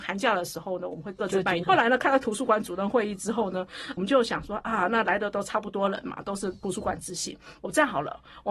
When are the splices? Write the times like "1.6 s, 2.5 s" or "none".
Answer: 1.6 s